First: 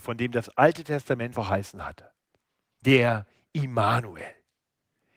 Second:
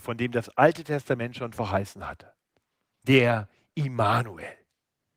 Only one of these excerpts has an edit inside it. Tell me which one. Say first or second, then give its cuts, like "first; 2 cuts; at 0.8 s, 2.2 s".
first; 1 cut; at 1.3 s